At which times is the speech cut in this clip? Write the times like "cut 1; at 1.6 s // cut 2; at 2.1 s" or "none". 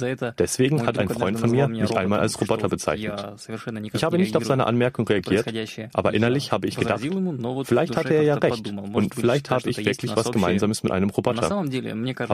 none